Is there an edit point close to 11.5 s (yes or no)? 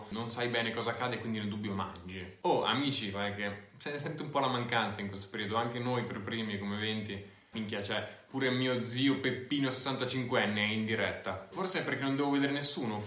yes